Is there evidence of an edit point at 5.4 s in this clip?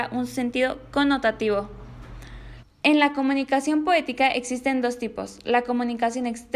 no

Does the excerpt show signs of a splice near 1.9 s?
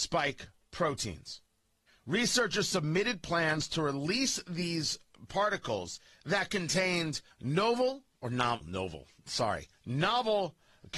yes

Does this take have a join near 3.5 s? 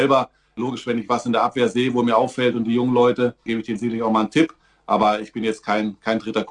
yes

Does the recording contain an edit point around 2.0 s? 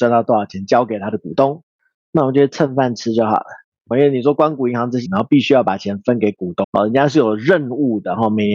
no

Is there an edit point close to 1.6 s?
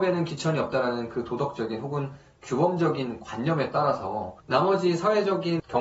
no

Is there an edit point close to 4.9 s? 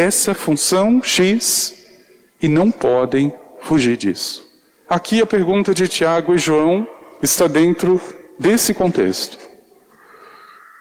yes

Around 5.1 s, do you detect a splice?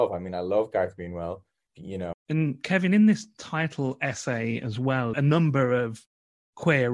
yes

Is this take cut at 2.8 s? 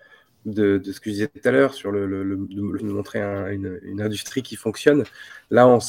yes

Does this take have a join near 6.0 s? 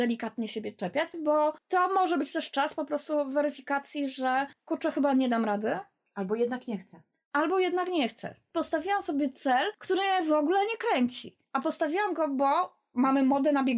no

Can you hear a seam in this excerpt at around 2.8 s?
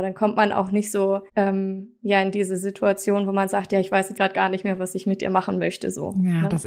no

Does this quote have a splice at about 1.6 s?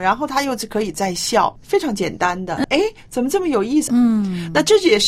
yes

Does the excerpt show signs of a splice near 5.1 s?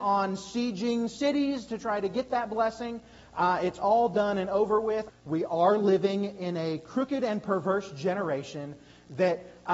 yes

